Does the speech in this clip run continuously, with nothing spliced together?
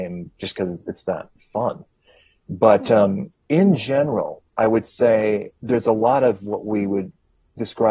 yes; 0 cuts

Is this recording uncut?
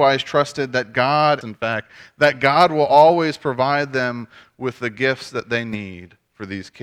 no; 1 cut; at 1.4 s

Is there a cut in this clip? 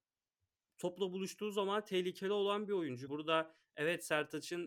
yes; 1 cut; at 3.1 s

